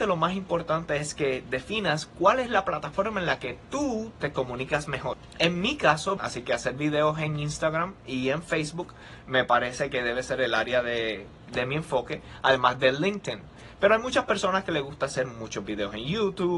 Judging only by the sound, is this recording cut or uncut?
cut